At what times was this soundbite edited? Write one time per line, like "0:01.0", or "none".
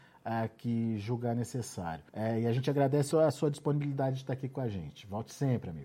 0:02.1
0:03.1